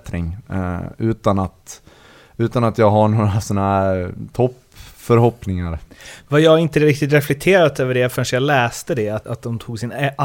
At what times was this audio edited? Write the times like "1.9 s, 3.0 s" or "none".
9.2 s